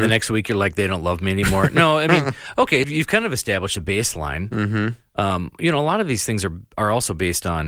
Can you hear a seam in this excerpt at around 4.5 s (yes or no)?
no